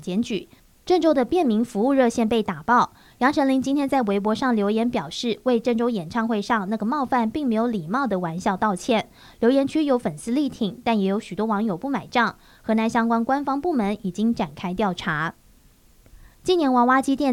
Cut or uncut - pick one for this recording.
uncut